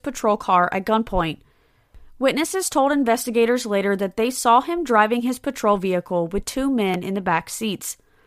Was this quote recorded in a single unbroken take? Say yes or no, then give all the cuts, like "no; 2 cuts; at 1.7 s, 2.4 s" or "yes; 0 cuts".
yes; 0 cuts